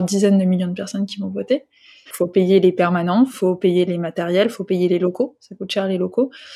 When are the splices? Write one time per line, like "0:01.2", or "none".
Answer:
0:02.1